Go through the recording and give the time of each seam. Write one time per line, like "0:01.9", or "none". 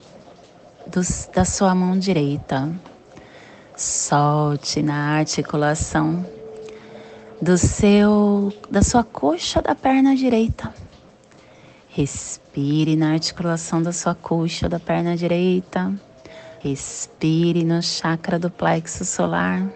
0:16.6